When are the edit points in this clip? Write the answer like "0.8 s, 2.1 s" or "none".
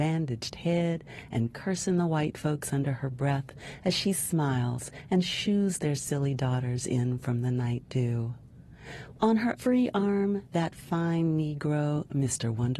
9.2 s